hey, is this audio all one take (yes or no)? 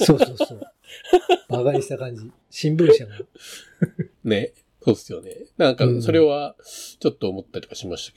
yes